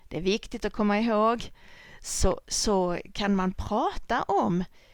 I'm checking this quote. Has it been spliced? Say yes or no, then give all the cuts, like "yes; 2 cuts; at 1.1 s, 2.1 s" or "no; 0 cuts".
no; 0 cuts